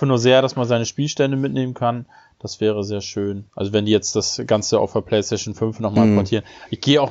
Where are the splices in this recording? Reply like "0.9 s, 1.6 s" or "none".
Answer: 3.5 s